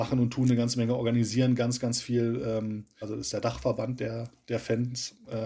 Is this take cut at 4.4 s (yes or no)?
no